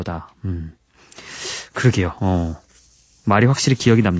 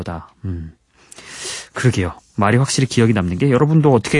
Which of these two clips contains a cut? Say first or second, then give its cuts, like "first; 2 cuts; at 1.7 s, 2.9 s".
second; 1 cut; at 2.2 s